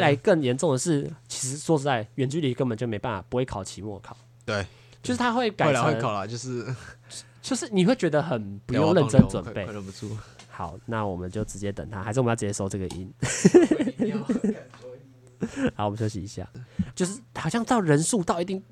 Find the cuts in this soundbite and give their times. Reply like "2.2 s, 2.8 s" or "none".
16.9 s